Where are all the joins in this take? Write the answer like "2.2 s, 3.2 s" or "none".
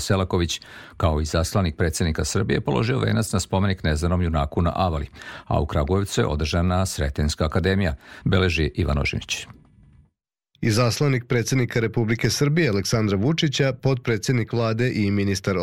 8.2 s